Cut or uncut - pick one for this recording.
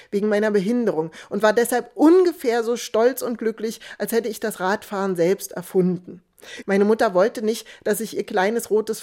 cut